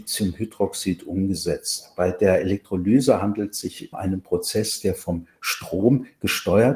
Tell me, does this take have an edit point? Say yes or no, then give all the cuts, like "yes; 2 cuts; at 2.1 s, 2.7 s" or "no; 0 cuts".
yes; 1 cut; at 3.9 s